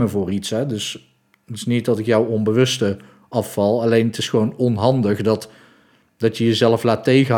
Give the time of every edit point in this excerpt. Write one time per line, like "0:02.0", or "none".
none

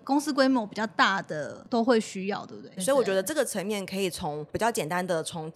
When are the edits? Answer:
0:02.8

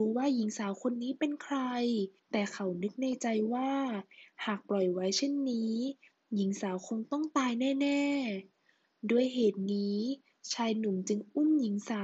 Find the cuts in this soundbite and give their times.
0:02.2

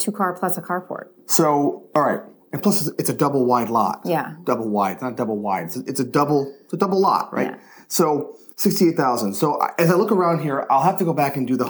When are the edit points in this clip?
none

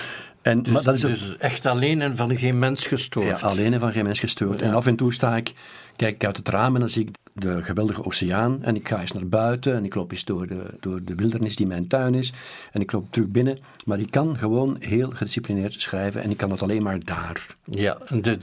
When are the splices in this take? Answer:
0:07.1
0:10.8

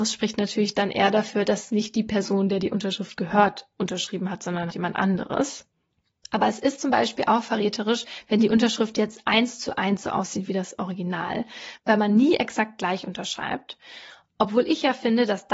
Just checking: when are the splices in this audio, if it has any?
0:04.7

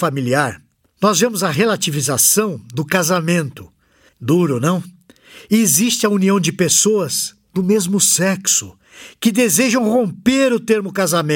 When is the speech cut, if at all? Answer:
0:04.1

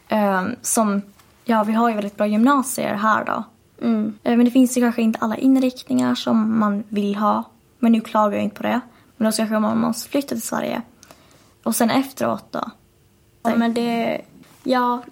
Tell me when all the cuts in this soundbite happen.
0:04.2
0:13.4

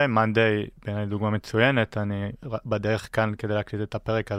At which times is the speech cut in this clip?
none

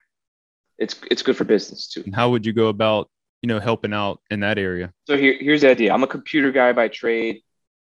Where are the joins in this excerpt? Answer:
0:02.1
0:05.0

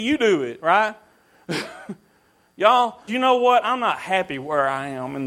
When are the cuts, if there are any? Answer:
0:03.1

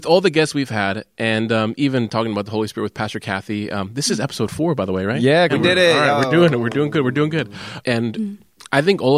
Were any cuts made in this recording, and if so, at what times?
0:05.5
0:07.8

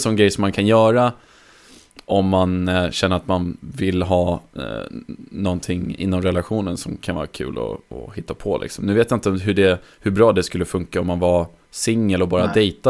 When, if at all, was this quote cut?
none

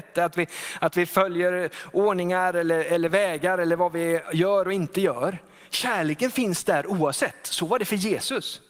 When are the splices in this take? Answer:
none

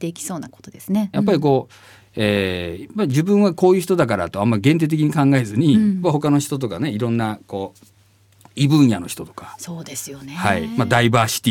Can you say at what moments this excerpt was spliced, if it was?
0:01.1

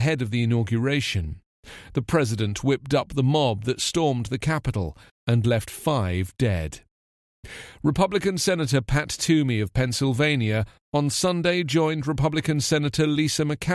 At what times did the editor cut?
0:05.1

